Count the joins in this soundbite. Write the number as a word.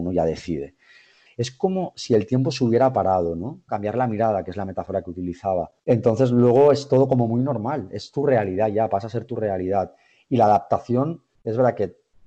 three